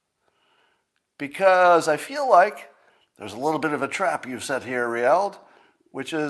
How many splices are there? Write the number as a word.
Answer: zero